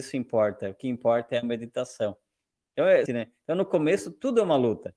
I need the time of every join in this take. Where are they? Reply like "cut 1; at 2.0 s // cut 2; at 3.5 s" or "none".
cut 1; at 3.1 s